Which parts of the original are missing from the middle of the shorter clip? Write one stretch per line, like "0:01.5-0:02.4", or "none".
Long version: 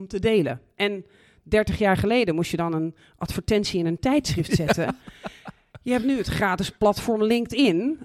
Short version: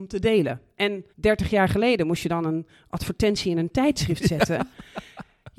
0:01.1-0:01.4